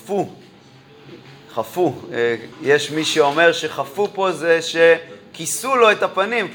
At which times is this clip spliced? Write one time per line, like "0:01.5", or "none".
0:02.5